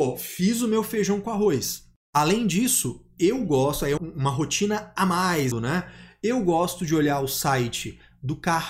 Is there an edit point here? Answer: yes; 2 cuts; at 4.0 s, 5.5 s

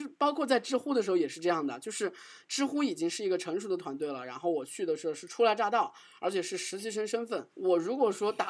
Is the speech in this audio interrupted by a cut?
yes; 1 cut; at 7.5 s

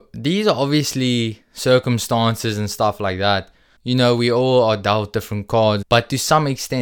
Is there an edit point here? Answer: yes; 2 cuts; at 3.8 s, 5.8 s

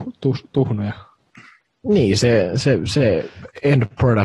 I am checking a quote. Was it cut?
no; 0 cuts

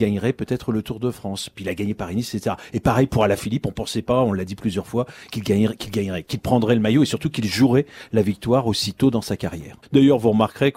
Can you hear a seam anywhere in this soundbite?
yes; 1 cut; at 9.8 s

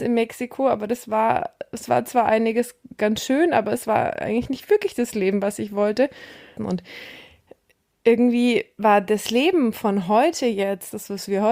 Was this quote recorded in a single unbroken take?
no; 1 cut; at 6.6 s

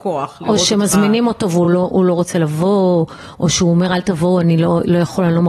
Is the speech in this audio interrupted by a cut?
no; 0 cuts

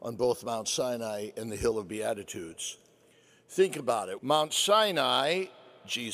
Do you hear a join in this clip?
yes; 1 cut; at 4.2 s

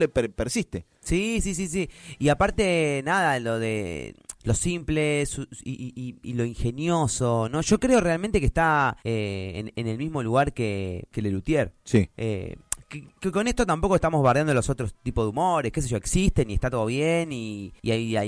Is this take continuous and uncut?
no; 1 cut; at 12.1 s

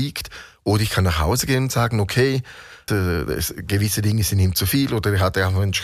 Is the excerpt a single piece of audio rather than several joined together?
no; 1 cut; at 2.9 s

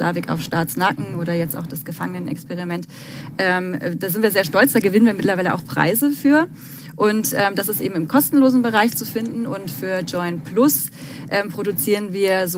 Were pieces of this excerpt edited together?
no; 0 cuts

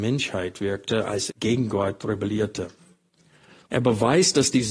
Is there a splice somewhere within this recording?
yes; 2 cuts; at 1.3 s, 3.7 s

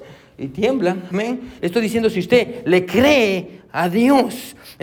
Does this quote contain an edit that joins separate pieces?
yes; 1 cut; at 1.6 s

